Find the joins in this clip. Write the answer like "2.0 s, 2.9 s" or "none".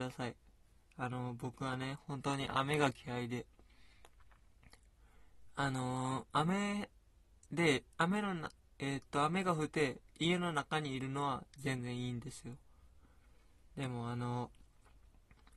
7.9 s, 9.7 s

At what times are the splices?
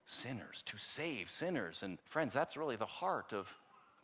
2.0 s

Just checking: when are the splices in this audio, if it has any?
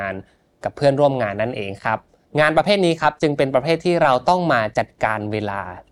none

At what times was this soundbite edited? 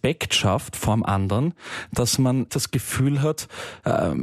2.5 s

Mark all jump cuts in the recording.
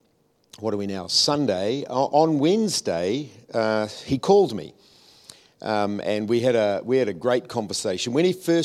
none

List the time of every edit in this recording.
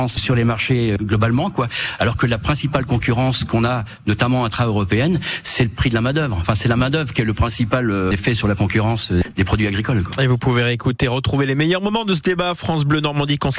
none

